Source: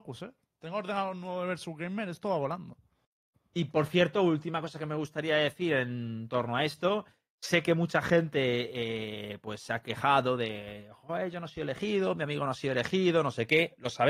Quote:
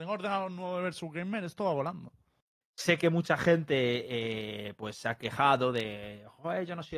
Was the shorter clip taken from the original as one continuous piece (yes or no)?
no